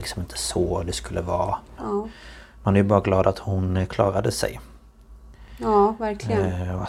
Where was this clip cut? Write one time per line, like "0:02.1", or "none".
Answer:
0:01.8